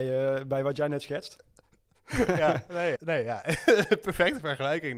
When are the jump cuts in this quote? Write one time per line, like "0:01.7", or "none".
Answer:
0:03.0